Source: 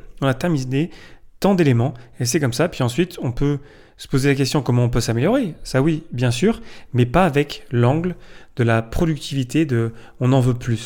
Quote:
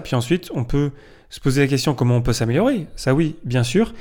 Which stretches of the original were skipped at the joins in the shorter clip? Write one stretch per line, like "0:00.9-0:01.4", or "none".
none